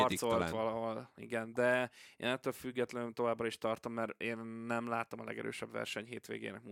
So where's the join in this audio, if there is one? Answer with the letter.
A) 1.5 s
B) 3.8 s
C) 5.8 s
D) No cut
D